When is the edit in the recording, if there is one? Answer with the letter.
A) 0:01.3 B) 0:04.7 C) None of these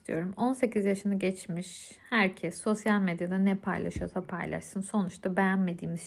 C